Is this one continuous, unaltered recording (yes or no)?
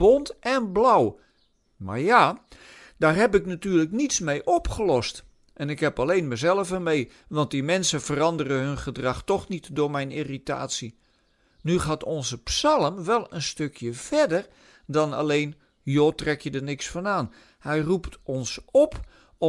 yes